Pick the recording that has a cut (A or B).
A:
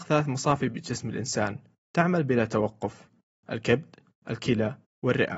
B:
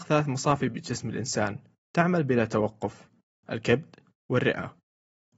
B